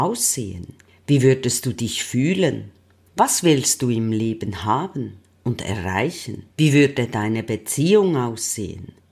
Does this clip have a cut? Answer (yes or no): yes